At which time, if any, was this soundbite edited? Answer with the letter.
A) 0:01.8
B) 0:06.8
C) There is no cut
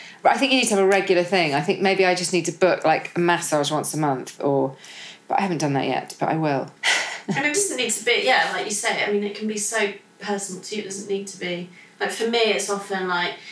B